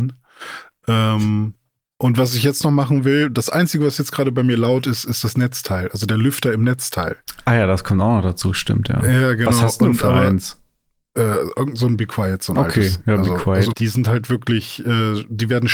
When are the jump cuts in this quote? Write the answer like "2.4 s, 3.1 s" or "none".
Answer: 13.7 s